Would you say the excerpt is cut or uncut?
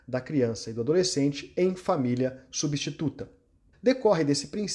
cut